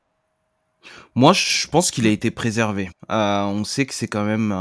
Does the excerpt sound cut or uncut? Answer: uncut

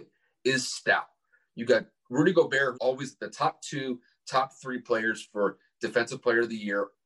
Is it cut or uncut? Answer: cut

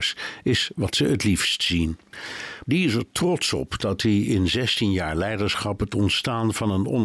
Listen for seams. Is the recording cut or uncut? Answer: cut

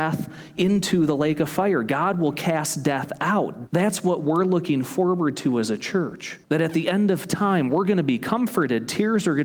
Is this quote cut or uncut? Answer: cut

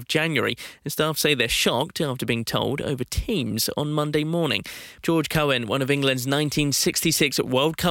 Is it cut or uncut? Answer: cut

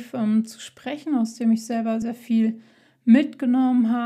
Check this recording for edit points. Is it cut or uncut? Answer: cut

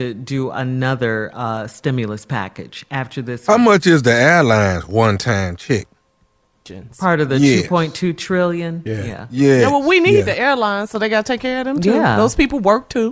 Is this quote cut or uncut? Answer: uncut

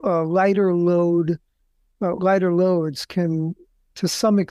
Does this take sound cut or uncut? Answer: uncut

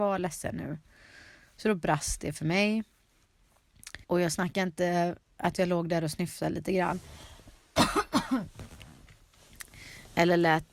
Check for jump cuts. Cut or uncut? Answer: cut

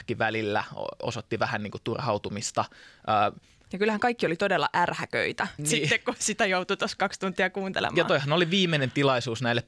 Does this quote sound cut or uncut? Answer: cut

